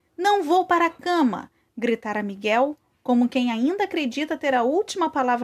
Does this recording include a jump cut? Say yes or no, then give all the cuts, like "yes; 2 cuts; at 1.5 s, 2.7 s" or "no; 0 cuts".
no; 0 cuts